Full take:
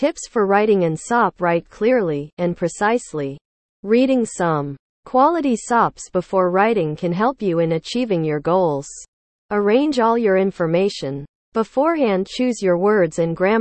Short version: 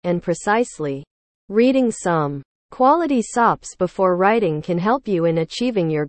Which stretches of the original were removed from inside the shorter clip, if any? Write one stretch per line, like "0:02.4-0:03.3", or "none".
none